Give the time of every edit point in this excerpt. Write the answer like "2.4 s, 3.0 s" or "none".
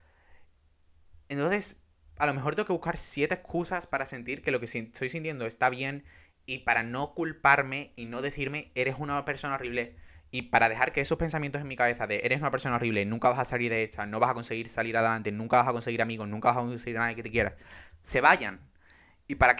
none